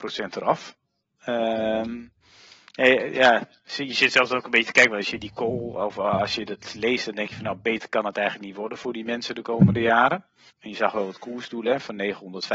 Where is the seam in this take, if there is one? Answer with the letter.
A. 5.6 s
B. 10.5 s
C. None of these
B